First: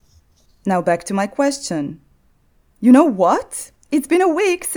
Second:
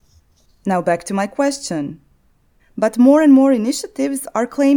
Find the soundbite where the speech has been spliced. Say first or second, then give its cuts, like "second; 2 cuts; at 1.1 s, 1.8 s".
second; 1 cut; at 2.6 s